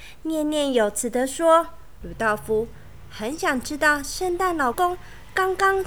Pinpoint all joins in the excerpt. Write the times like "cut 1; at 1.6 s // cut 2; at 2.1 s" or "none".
cut 1; at 2.0 s // cut 2; at 4.7 s